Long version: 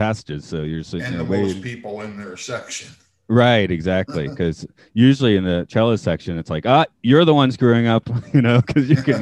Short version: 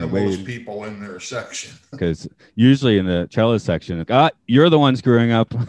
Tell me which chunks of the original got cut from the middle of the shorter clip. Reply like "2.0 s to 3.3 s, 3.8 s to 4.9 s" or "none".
3.1 s to 4.3 s, 6.4 s to 6.6 s